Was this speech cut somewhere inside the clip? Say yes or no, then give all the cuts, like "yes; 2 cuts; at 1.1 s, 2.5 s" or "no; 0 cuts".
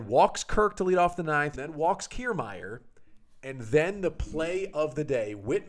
yes; 1 cut; at 1.5 s